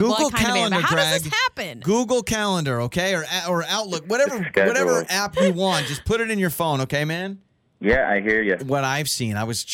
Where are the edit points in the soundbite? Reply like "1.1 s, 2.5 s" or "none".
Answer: 8.6 s